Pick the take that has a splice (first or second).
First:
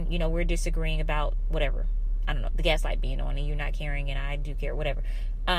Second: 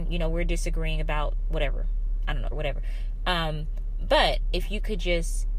second